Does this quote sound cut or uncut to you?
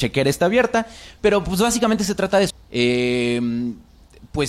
cut